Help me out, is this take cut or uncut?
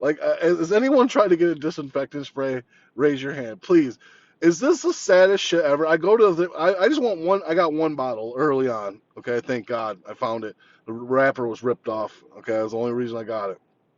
uncut